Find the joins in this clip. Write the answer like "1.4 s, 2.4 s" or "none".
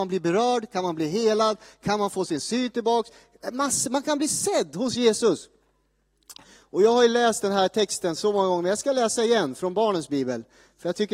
none